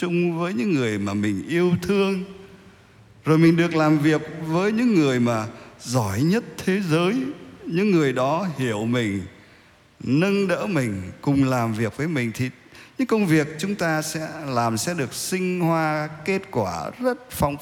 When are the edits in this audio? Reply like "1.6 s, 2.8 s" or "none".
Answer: none